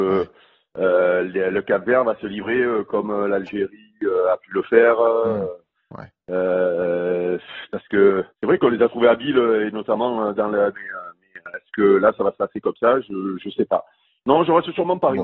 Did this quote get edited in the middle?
yes; 2 cuts; at 8.3 s, 10.7 s

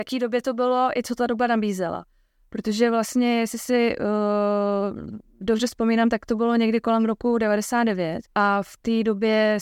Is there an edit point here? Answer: yes; 1 cut; at 8.3 s

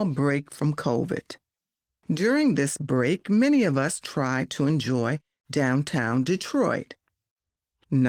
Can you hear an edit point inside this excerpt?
no; 0 cuts

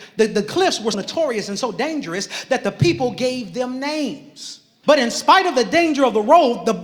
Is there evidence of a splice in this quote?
yes; 2 cuts; at 0.9 s, 4.8 s

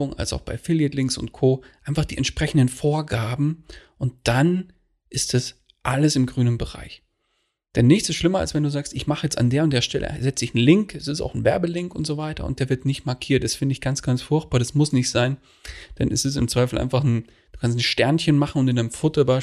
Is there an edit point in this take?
no; 0 cuts

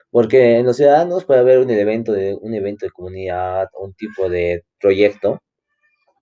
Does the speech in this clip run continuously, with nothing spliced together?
yes; 0 cuts

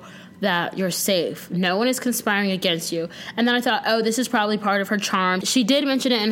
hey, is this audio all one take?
no; 1 cut; at 5.4 s

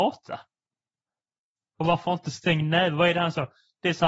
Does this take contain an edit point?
no; 0 cuts

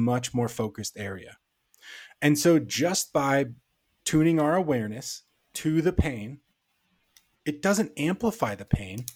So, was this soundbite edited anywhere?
no; 0 cuts

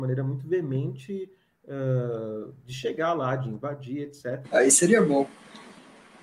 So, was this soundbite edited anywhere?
yes; 1 cut; at 4.4 s

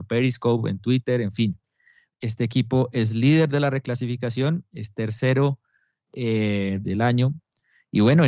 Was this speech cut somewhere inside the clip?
yes; 2 cuts; at 2.1 s, 6.8 s

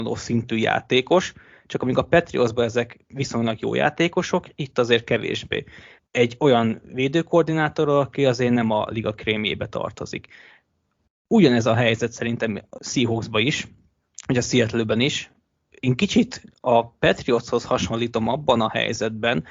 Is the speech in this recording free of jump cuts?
no; 2 cuts; at 6.0 s, 12.8 s

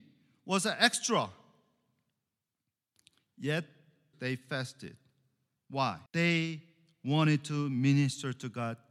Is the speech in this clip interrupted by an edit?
yes; 2 cuts; at 4.1 s, 6.1 s

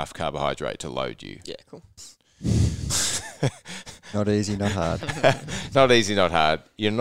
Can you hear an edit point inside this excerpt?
yes; 1 cut; at 2.0 s

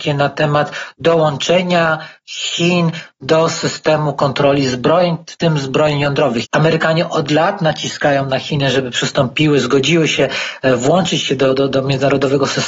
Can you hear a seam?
yes; 1 cut; at 6.4 s

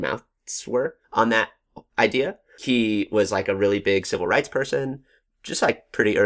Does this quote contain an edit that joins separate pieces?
yes; 1 cut; at 1.0 s

